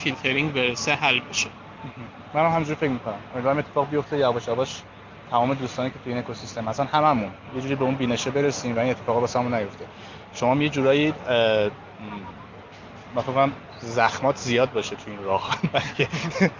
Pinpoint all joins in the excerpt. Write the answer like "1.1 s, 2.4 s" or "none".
none